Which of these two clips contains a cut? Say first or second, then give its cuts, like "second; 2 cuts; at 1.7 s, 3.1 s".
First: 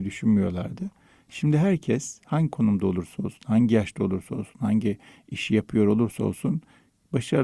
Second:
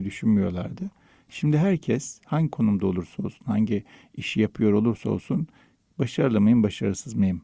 second; 1 cut; at 3.4 s